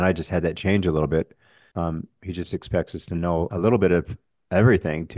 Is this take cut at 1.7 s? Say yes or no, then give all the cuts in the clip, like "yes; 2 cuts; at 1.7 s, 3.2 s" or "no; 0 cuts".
yes; 2 cuts; at 1.7 s, 3.5 s